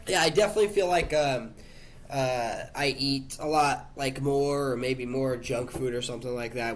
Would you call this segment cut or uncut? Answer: uncut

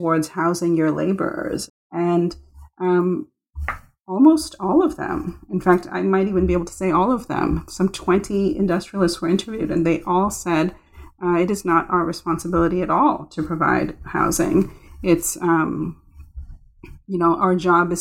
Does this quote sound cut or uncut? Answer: cut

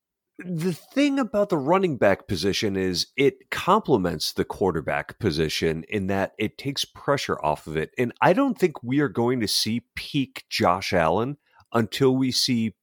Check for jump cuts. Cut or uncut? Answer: uncut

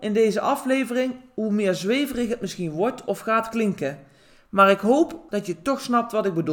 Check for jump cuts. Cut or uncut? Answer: cut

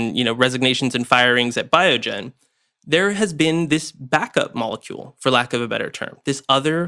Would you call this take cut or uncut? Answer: uncut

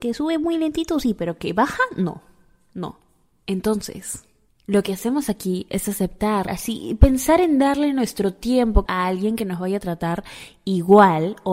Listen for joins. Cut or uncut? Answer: cut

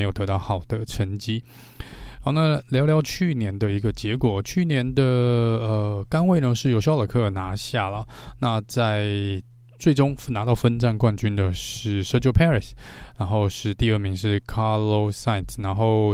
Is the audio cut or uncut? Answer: uncut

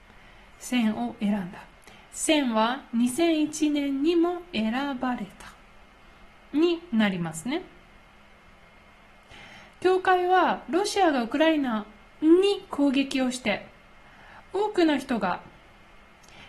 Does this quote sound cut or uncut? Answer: uncut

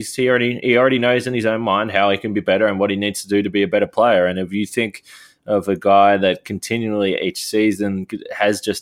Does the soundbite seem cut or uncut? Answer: uncut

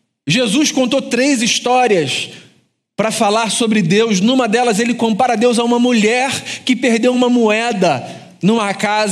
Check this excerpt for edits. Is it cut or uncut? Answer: uncut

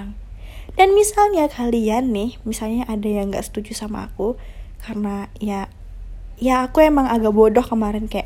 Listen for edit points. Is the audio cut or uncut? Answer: uncut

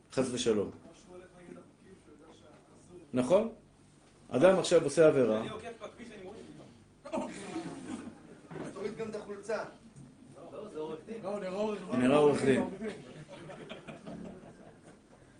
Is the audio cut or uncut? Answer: cut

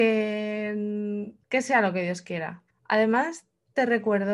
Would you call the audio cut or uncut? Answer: cut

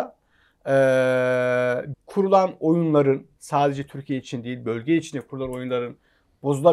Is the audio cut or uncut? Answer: cut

